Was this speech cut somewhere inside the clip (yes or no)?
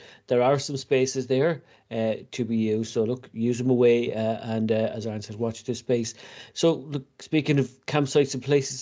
no